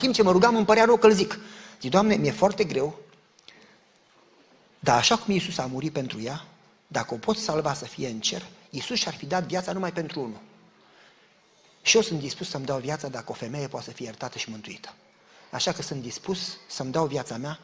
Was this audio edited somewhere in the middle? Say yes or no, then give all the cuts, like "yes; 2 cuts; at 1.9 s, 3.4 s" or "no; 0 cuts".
no; 0 cuts